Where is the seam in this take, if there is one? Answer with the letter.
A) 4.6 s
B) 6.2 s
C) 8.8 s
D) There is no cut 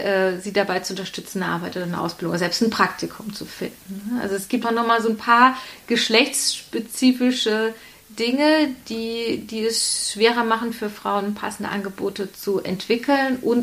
A